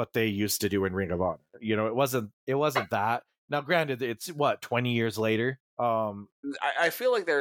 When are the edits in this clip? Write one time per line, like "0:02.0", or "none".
0:05.7